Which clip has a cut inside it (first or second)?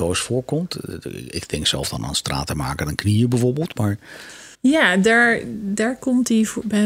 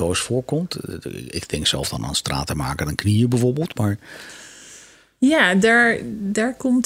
first